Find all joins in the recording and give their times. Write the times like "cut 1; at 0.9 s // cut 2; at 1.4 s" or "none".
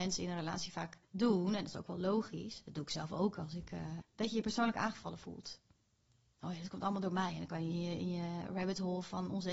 cut 1; at 1.0 s // cut 2; at 4.0 s